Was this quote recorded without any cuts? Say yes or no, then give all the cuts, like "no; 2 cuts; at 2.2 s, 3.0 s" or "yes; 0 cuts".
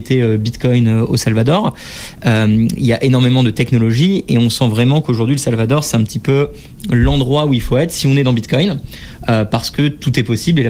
yes; 0 cuts